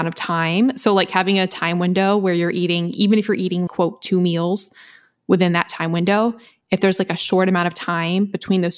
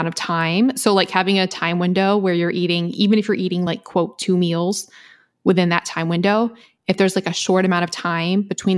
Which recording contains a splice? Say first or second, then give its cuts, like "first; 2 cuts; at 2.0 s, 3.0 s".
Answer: first; 1 cut; at 3.7 s